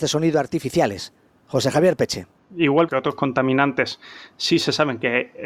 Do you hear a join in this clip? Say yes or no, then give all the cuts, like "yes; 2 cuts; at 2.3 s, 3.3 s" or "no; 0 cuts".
no; 0 cuts